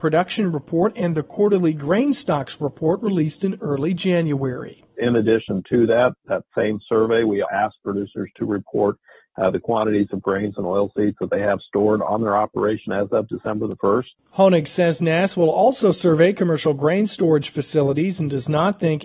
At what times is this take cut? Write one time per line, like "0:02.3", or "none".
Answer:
0:05.0
0:07.4